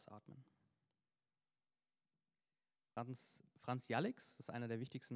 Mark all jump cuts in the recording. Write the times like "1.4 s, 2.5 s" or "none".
none